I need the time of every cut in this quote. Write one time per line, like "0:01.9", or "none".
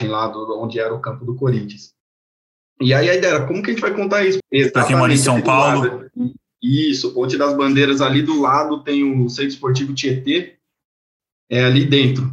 0:04.4